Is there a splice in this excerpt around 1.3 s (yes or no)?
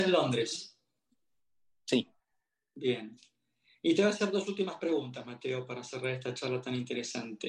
no